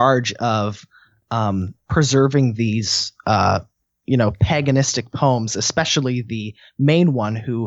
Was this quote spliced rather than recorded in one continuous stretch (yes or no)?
no